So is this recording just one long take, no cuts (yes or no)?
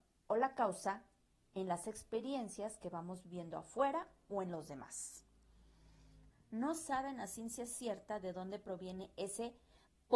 no